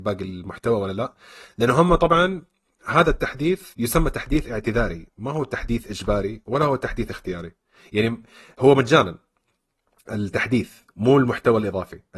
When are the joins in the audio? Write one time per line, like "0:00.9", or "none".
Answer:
0:03.7